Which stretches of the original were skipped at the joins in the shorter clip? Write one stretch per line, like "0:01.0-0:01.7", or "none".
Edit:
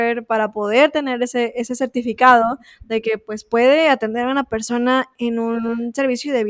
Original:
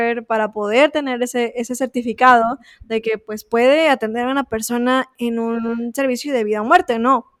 none